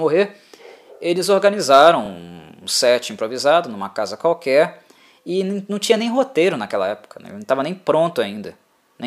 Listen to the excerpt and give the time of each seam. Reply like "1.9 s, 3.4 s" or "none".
none